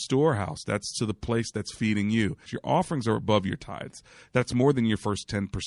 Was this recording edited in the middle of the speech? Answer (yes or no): yes